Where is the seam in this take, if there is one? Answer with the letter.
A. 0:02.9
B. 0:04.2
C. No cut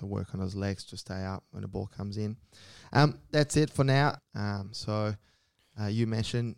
B